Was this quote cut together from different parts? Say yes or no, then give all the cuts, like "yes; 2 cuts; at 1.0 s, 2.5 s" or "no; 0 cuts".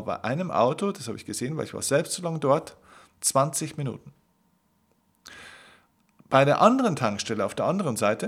no; 0 cuts